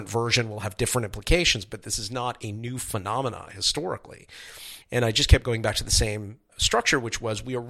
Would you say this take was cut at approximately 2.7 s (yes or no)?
no